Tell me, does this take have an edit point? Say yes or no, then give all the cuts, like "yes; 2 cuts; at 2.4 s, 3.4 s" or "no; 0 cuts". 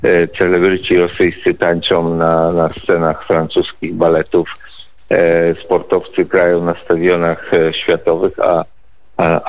no; 0 cuts